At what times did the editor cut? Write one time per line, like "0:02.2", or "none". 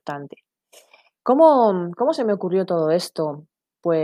none